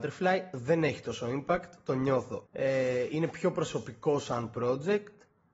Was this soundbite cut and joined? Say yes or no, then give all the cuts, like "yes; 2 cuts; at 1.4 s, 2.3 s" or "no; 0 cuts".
yes; 1 cut; at 2.5 s